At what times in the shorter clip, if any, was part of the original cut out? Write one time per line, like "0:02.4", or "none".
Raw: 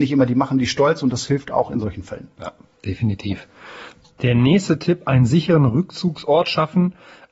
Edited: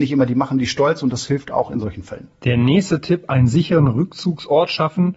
0:02.3